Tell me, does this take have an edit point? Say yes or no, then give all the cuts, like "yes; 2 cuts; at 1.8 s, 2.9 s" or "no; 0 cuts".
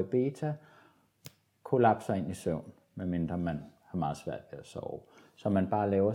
no; 0 cuts